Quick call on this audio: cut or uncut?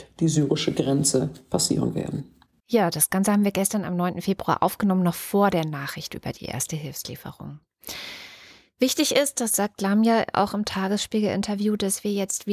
uncut